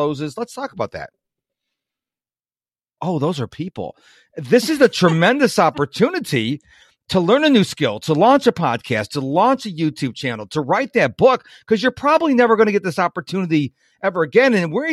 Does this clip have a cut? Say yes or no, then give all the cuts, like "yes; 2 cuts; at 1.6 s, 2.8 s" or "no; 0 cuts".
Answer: yes; 1 cut; at 3.0 s